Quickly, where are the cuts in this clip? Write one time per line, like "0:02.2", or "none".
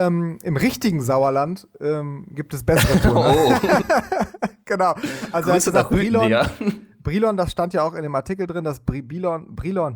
none